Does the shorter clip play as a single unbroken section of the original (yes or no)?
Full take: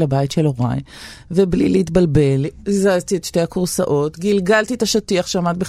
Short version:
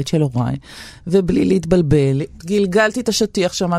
no